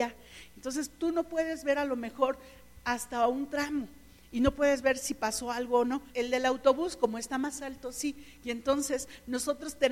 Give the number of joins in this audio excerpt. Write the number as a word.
one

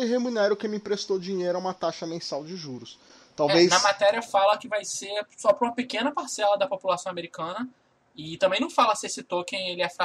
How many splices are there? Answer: zero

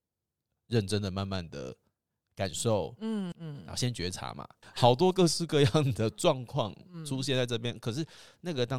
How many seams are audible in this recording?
two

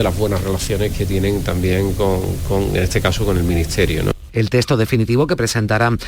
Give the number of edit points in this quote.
one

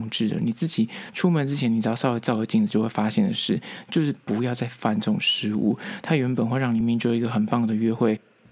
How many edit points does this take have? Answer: one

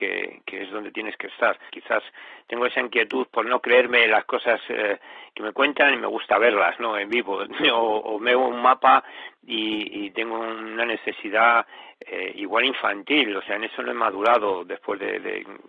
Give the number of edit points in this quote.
one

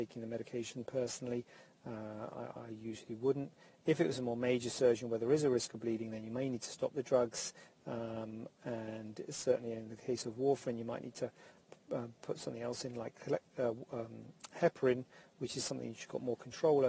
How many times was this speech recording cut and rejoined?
one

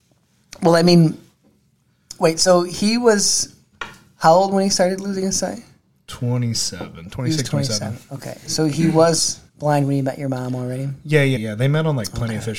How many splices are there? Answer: two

